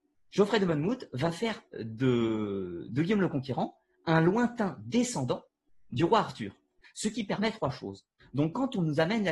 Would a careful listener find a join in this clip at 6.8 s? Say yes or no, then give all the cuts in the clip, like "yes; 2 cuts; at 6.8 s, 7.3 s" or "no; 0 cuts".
yes; 2 cuts; at 6.8 s, 8.2 s